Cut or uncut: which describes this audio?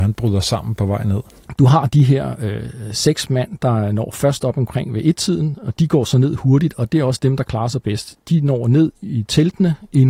uncut